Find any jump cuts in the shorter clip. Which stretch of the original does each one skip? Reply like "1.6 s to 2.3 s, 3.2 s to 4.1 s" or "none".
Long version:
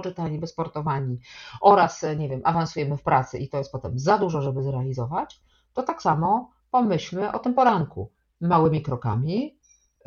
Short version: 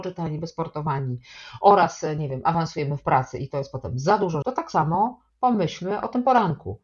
4.4 s to 5.7 s